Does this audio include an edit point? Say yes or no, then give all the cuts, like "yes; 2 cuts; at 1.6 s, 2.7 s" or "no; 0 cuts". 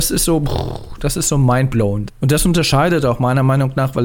yes; 1 cut; at 2.1 s